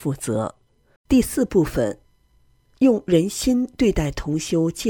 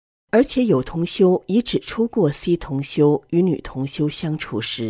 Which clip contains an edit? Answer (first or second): first